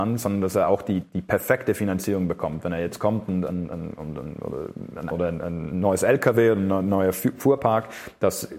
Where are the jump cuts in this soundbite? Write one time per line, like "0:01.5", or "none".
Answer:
0:01.0
0:05.1